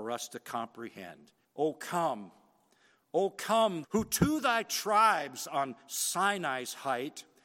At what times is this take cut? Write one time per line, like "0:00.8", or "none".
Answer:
0:01.4
0:03.8